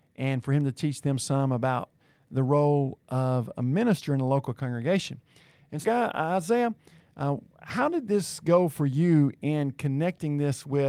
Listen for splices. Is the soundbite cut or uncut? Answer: cut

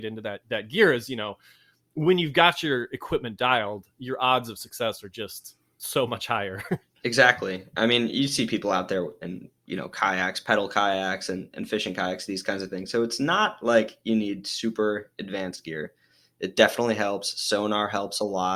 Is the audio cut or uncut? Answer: uncut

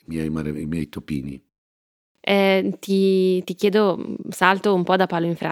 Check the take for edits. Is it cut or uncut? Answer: uncut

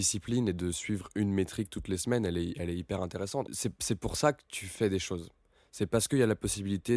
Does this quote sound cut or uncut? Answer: cut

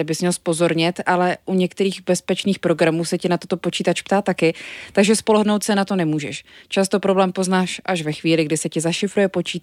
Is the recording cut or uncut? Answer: uncut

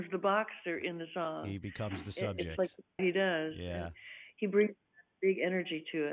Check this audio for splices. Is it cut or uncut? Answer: cut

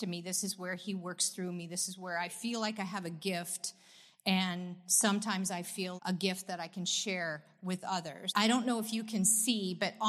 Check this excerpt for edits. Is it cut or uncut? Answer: cut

